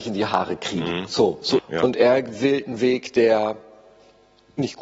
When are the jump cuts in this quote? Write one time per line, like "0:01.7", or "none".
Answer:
0:01.6

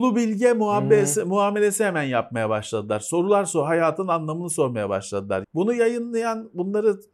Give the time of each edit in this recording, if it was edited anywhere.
0:05.4

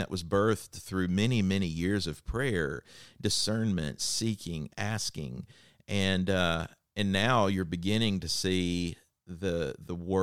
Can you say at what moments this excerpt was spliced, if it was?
none

